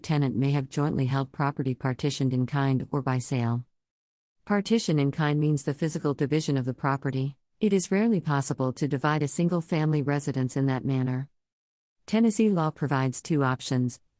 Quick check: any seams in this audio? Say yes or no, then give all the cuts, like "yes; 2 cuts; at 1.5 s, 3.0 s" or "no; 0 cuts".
yes; 1 cut; at 7.5 s